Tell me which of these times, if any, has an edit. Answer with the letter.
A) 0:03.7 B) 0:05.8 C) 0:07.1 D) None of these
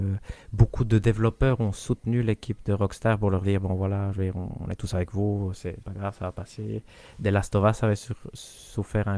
B